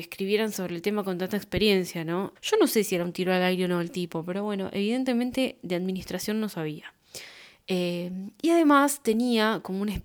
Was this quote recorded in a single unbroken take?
no; 1 cut; at 2.4 s

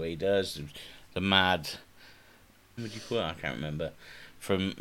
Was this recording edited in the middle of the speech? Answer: yes; 1 cut; at 2.8 s

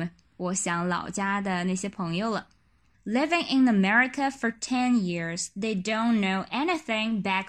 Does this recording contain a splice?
yes; 1 cut; at 2.9 s

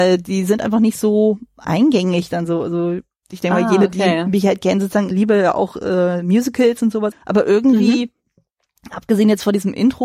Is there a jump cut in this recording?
yes; 2 cuts; at 5.1 s, 7.1 s

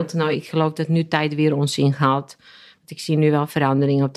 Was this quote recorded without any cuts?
yes; 0 cuts

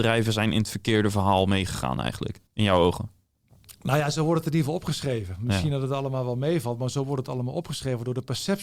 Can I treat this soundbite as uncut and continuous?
no; 1 cut; at 2.5 s

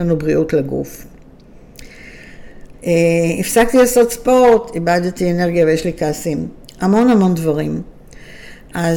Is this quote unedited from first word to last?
no; 1 cut; at 2.7 s

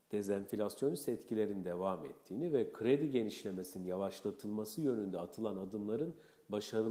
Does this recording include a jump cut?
no; 0 cuts

